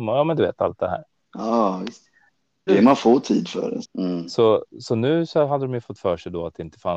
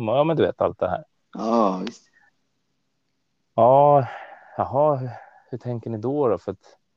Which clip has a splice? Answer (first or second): first